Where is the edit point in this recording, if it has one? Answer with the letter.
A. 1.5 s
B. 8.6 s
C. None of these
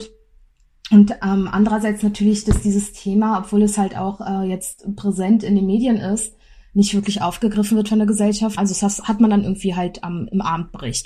B